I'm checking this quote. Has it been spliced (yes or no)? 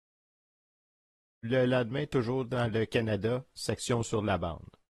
no